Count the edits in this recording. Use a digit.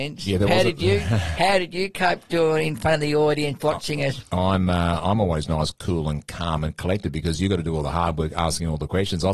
0